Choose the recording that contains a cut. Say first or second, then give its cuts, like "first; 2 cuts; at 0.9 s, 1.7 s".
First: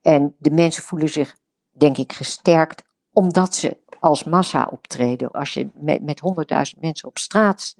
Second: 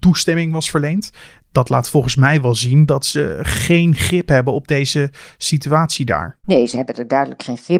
first; 1 cut; at 5.3 s